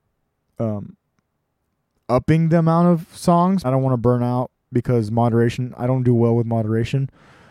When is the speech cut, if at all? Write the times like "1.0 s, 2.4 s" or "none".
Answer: 3.6 s